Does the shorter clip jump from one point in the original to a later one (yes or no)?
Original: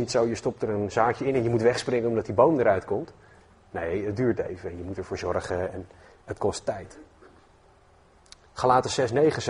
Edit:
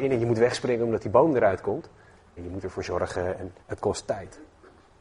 yes